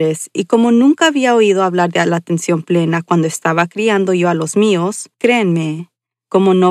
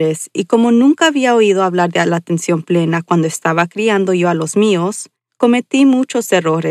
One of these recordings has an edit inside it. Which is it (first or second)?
first